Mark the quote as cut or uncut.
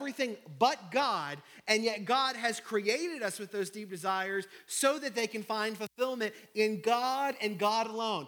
uncut